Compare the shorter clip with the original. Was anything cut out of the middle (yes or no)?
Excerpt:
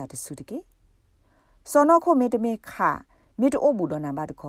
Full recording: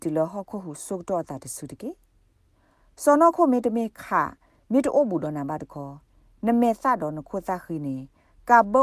no